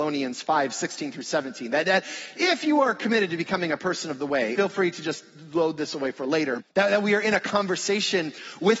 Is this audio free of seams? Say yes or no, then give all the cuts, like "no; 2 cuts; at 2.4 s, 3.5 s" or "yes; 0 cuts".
no; 2 cuts; at 4.5 s, 6.6 s